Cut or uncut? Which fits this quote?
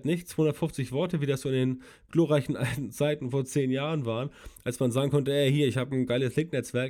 uncut